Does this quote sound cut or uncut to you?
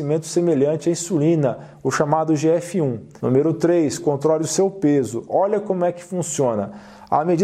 cut